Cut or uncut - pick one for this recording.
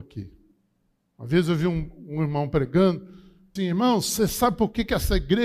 cut